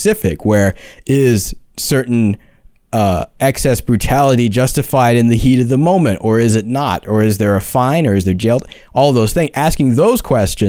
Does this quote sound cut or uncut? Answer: uncut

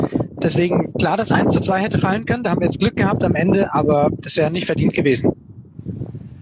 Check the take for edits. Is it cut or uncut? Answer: uncut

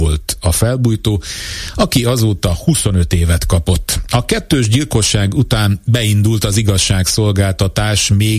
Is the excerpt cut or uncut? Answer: uncut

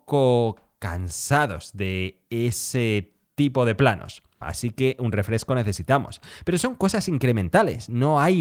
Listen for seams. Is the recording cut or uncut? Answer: cut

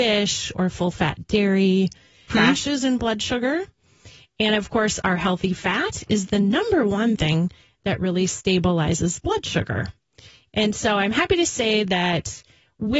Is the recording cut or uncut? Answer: cut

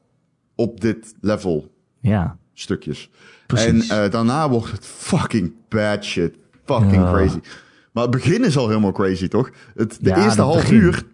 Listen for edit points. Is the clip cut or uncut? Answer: uncut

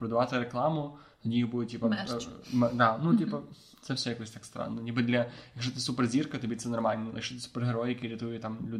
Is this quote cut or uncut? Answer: uncut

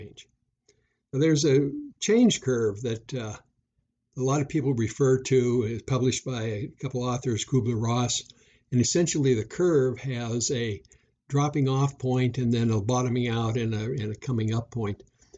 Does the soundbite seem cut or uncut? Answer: uncut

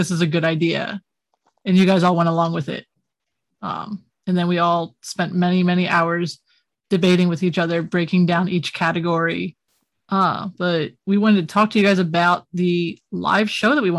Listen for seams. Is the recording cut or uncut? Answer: cut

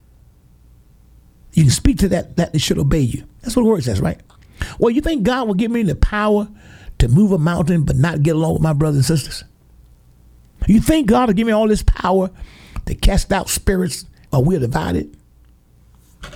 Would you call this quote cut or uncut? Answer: cut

